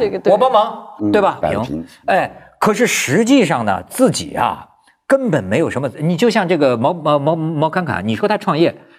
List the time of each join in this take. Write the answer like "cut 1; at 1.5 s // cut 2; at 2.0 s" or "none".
cut 1; at 1.4 s